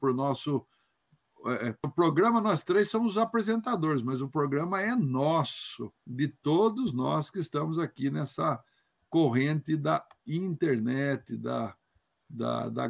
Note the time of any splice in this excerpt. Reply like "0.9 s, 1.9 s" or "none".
1.8 s, 6.0 s